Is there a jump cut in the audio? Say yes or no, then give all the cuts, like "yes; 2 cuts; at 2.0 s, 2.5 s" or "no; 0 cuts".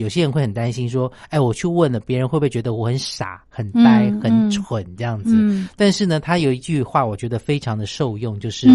no; 0 cuts